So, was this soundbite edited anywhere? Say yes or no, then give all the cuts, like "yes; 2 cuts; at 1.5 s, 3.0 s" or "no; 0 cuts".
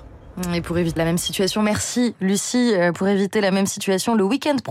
yes; 1 cut; at 1.0 s